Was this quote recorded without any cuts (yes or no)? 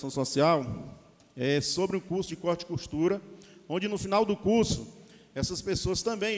yes